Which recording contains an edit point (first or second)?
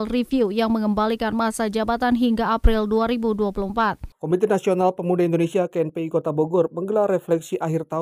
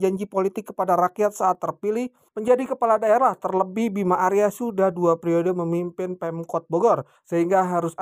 first